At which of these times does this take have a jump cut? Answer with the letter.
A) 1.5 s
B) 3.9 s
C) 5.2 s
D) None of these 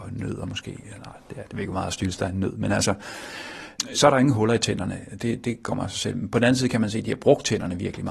B